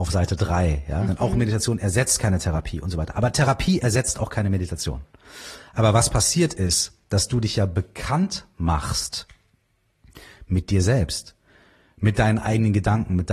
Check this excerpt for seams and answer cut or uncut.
cut